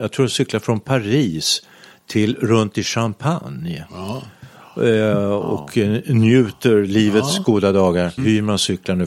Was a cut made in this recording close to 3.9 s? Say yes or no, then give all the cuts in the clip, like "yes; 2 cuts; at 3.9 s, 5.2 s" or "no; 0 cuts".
no; 1 cut; at 8.2 s